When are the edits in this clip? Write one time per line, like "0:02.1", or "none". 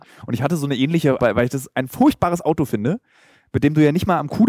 0:01.2